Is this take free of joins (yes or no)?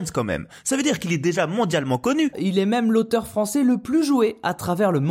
no